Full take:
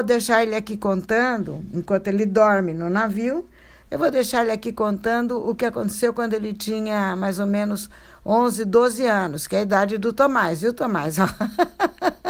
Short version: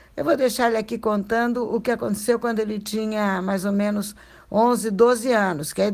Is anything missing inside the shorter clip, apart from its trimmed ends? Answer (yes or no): no